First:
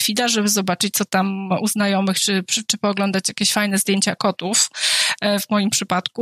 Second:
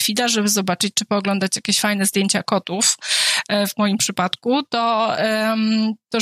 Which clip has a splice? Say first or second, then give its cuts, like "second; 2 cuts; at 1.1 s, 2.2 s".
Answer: second; 1 cut; at 0.9 s